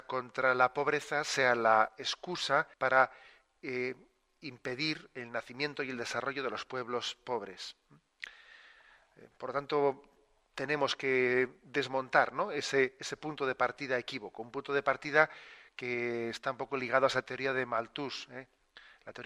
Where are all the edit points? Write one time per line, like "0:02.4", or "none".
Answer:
0:02.7